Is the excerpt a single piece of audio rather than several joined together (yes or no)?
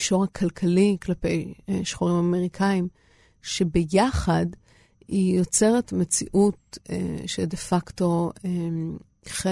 yes